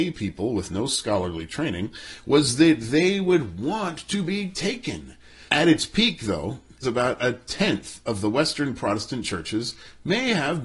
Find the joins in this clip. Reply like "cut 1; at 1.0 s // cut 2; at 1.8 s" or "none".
cut 1; at 5.5 s // cut 2; at 6.8 s